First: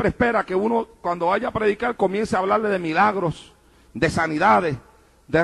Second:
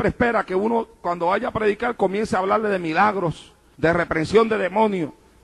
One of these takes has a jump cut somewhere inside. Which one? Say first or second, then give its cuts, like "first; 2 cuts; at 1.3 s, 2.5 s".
second; 1 cut; at 3.7 s